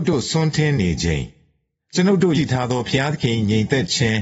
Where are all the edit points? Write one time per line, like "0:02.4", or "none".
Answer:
0:02.3